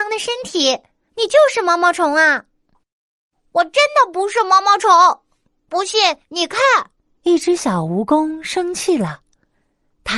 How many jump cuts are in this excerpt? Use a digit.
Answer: 2